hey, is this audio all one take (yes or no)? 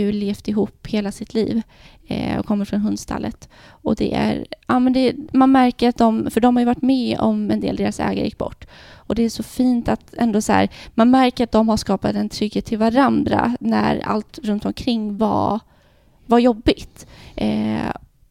yes